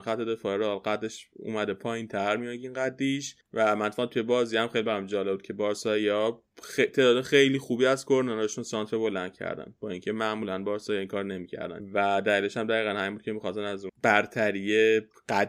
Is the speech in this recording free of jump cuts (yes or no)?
yes